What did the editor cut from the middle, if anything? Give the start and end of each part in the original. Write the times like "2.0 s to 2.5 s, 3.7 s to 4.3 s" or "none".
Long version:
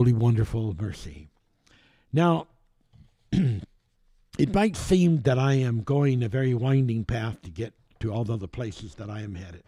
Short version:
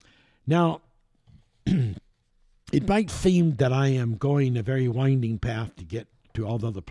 none